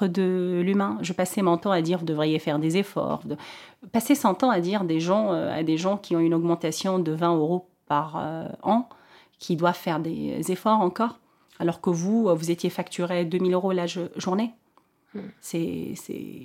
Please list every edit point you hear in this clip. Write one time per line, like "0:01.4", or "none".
none

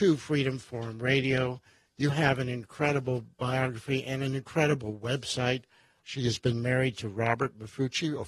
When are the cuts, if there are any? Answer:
0:06.0

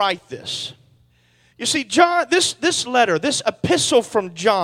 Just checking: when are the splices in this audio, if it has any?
none

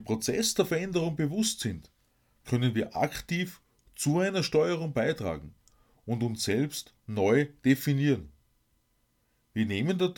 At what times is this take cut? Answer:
none

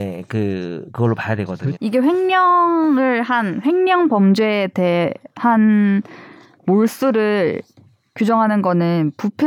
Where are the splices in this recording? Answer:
0:01.7

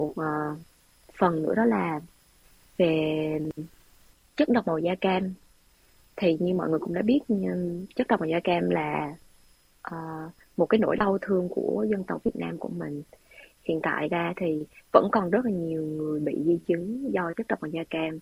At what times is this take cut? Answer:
none

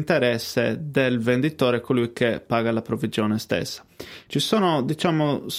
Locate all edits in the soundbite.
0:04.3

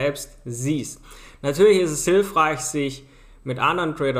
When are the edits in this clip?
none

